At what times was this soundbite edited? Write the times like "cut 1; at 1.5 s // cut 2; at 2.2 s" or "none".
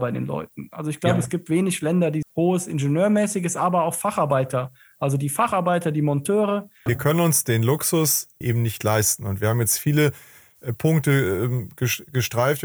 cut 1; at 2.2 s // cut 2; at 6.9 s // cut 3; at 8.4 s